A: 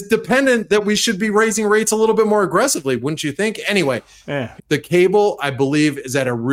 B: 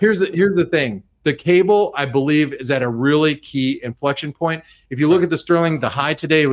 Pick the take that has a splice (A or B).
A